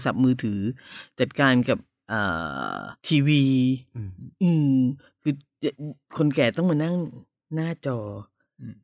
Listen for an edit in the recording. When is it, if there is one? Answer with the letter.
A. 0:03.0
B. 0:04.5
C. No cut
A